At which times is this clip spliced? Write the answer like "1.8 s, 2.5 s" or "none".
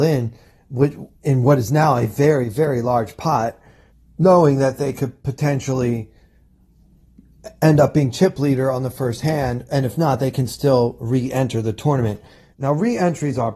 12.5 s

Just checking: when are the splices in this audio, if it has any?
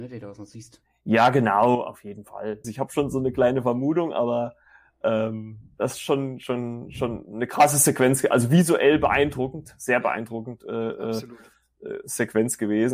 2.6 s, 5.7 s

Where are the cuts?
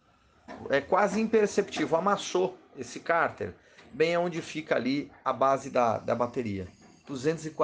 none

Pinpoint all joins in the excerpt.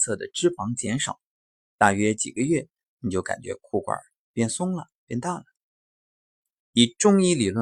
6.6 s

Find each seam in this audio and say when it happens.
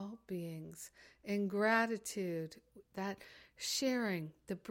2.8 s

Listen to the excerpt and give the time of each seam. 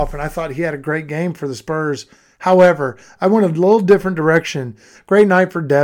4.9 s

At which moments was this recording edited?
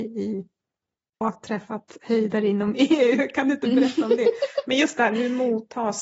1.2 s

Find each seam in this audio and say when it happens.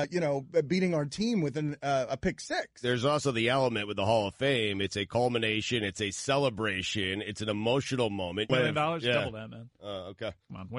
8.5 s

